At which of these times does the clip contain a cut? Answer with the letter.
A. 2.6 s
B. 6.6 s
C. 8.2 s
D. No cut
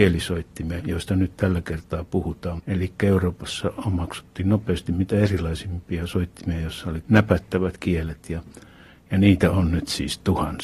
A